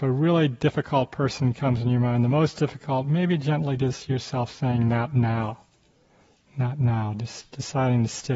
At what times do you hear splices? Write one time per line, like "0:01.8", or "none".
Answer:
none